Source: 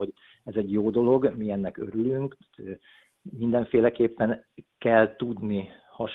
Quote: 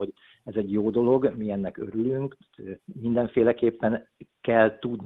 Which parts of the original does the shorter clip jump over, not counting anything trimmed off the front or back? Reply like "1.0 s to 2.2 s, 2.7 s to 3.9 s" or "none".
2.8 s to 3.2 s